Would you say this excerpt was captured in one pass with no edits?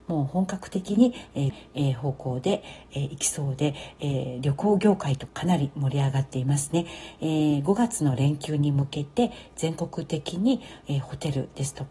no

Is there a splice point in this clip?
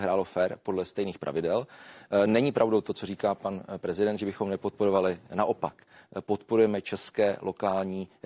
no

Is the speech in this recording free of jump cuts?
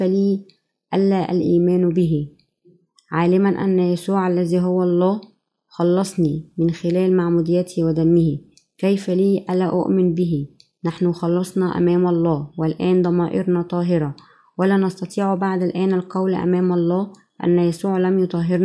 yes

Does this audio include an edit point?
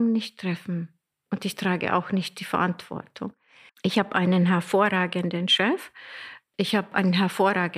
yes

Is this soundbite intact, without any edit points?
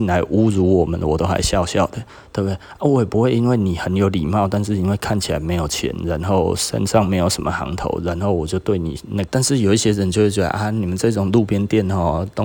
no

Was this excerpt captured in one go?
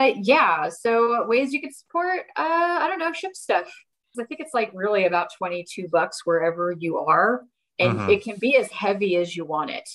no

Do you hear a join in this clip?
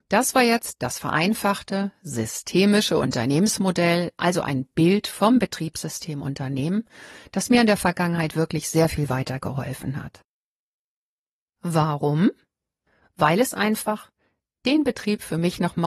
no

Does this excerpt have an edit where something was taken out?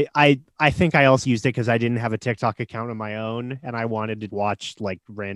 yes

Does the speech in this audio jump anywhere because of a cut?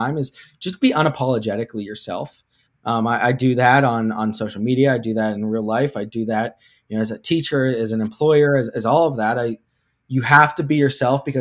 no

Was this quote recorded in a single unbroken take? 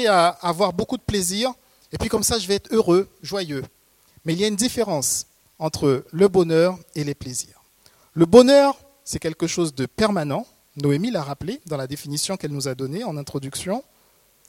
yes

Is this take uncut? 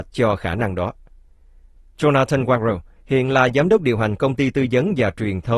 no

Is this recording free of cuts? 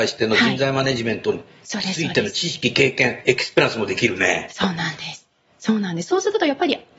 no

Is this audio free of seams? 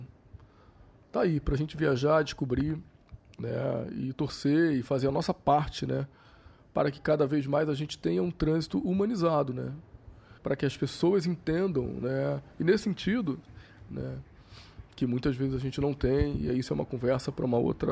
no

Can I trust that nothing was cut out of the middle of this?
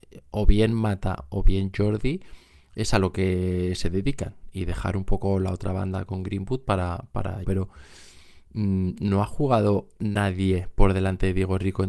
no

